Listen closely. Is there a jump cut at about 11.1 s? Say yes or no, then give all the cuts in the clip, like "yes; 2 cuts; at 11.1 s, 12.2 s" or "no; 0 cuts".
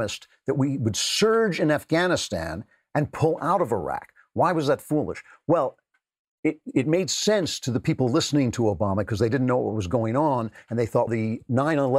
yes; 1 cut; at 11.1 s